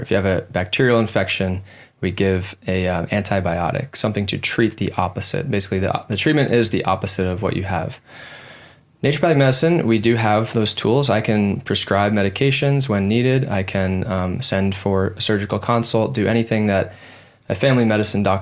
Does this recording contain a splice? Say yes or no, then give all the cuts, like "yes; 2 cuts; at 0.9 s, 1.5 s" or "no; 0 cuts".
no; 0 cuts